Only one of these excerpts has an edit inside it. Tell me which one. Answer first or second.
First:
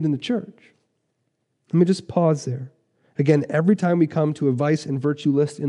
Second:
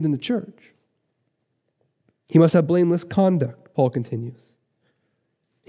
first